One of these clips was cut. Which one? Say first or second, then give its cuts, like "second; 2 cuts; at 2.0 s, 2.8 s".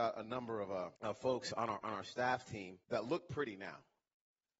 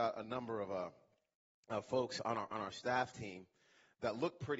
first; 2 cuts; at 0.9 s, 2.8 s